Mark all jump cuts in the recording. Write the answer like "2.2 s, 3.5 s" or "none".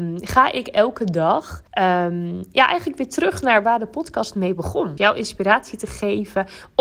1.7 s, 5.0 s